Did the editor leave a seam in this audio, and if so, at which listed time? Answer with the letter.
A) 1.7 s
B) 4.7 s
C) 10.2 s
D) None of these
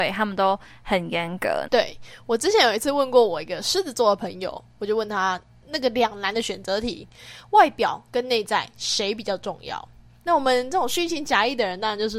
A